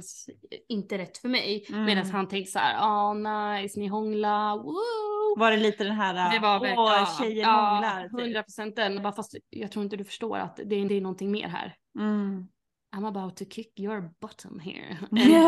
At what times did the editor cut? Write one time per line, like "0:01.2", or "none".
0:09.0
0:10.9